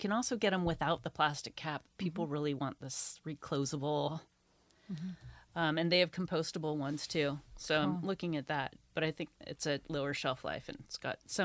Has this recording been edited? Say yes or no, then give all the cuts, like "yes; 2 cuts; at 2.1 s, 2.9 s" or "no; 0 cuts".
no; 0 cuts